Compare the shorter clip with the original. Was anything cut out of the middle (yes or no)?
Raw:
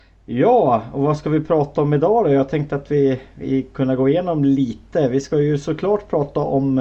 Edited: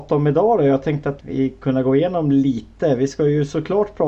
yes